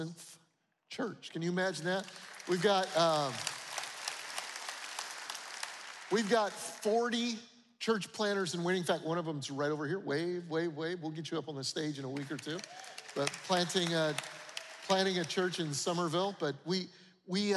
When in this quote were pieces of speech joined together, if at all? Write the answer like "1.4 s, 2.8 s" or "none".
none

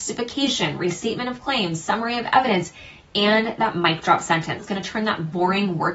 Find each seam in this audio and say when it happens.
4.6 s

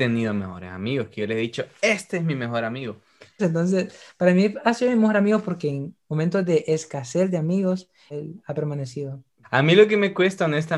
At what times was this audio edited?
3.4 s, 8.1 s, 9.4 s

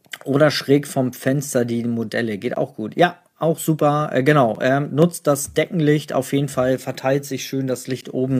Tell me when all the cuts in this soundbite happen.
none

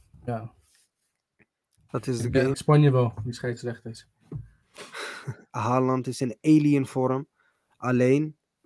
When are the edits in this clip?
2.5 s, 5.5 s

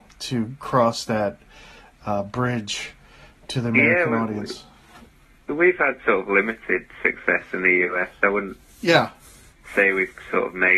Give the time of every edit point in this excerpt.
none

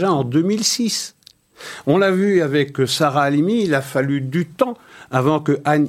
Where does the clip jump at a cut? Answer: none

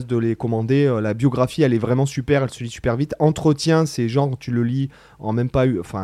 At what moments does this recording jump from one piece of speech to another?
none

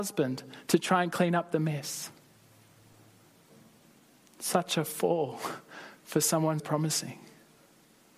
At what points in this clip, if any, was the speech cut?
6.6 s

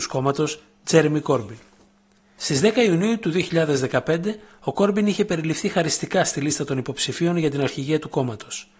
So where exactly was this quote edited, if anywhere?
none

